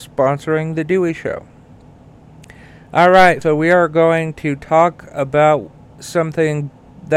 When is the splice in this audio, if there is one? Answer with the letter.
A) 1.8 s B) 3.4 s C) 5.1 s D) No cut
B